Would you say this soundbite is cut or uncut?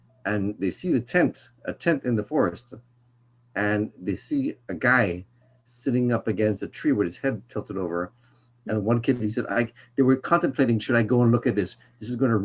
uncut